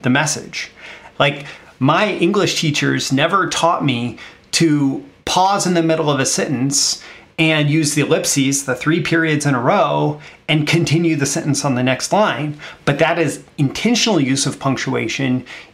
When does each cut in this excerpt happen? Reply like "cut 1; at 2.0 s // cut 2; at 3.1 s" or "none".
cut 1; at 1.1 s